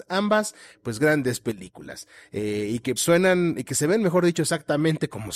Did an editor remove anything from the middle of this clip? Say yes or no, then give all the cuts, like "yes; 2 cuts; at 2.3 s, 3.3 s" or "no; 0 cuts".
yes; 2 cuts; at 1.0 s, 3.0 s